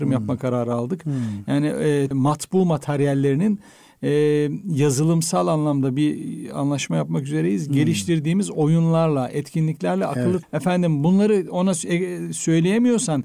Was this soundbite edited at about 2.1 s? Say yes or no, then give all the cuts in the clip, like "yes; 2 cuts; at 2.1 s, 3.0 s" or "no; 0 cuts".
yes; 2 cuts; at 2.1 s, 10.4 s